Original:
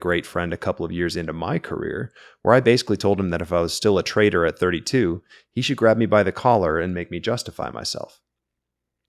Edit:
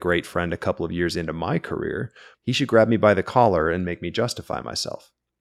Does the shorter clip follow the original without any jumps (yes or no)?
no